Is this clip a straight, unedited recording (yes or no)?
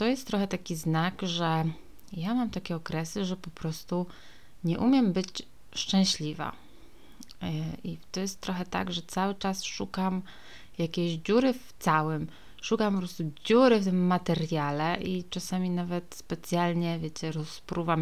yes